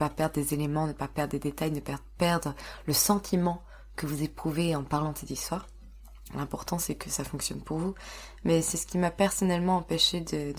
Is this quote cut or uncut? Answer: cut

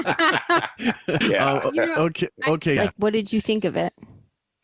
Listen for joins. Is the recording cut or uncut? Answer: cut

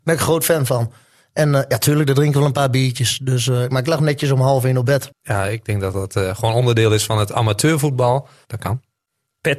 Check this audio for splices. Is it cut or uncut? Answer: cut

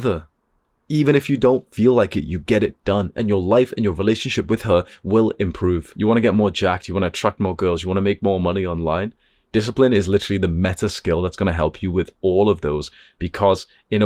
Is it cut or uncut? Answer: uncut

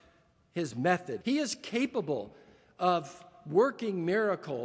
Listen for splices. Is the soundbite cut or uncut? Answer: cut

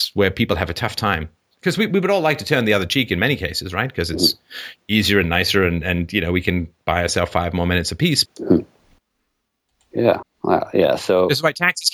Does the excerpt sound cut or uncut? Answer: cut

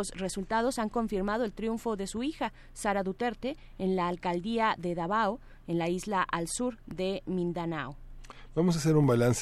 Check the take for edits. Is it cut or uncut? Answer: uncut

